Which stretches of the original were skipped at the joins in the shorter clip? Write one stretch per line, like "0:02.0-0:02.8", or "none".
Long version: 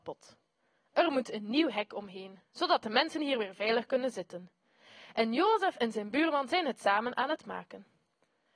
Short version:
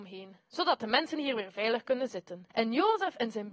0:04.5-0:05.1